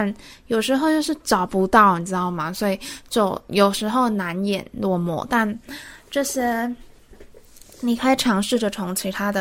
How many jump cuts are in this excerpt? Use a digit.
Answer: 0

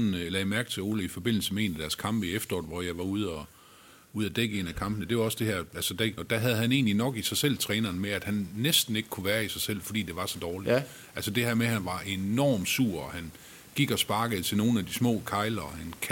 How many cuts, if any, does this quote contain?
1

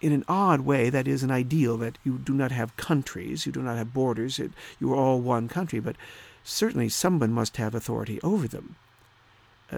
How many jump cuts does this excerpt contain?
0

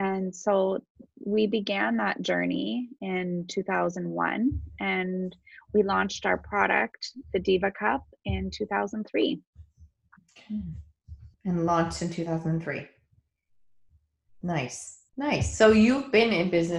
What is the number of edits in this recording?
2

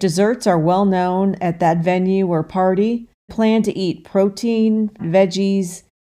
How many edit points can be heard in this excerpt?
2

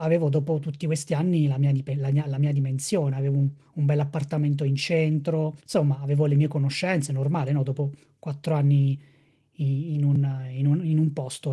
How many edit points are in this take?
1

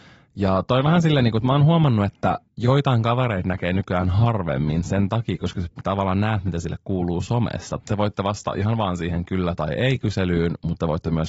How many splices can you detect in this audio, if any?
2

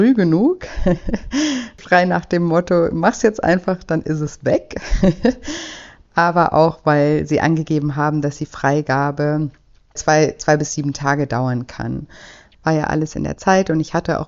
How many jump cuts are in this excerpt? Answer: 1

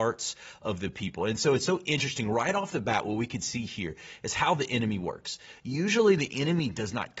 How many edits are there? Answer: 0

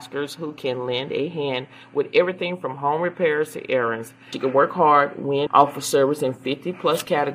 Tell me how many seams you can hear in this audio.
2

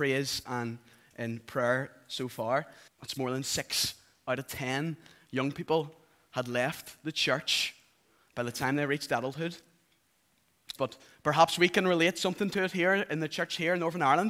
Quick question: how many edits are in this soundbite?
2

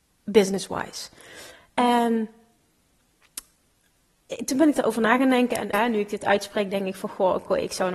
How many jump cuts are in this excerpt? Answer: 1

